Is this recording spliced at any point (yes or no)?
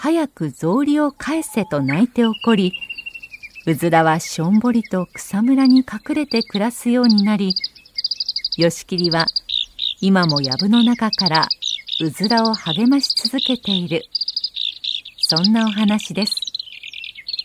no